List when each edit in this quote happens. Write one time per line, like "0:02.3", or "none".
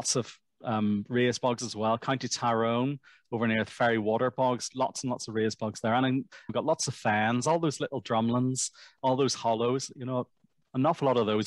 0:06.5